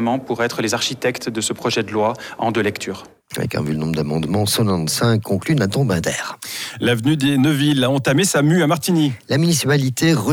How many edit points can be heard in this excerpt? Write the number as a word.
one